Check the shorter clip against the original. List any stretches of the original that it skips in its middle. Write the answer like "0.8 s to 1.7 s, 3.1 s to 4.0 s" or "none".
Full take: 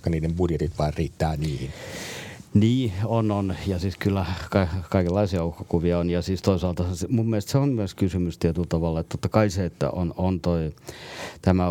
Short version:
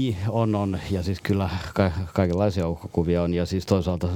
none